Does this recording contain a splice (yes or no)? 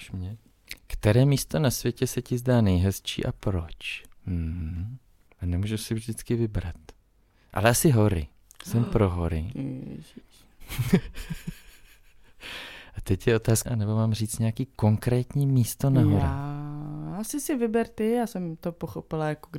yes